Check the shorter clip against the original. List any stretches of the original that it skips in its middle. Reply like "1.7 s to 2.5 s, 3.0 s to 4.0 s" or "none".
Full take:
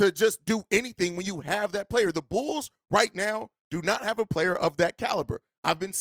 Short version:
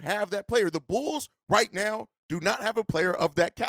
none